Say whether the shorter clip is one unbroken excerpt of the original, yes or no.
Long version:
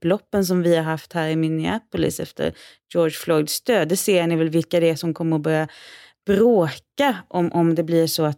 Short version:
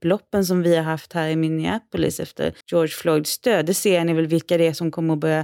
no